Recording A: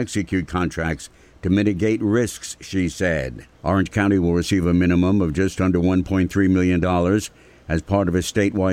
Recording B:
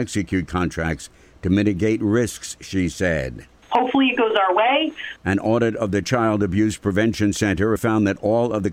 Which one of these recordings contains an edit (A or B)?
B